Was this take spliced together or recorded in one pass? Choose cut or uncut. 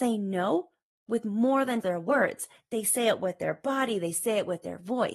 cut